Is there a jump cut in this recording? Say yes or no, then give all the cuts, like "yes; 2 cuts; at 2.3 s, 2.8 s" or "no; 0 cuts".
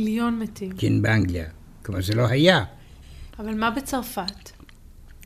yes; 1 cut; at 3.3 s